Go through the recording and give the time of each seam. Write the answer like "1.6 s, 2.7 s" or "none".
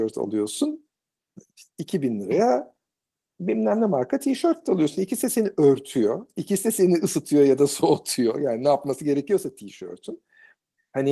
none